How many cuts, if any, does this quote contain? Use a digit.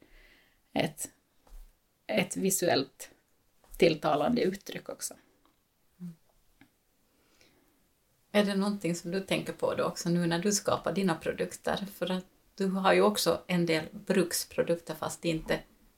0